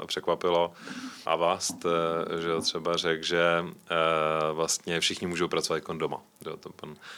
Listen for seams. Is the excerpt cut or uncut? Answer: cut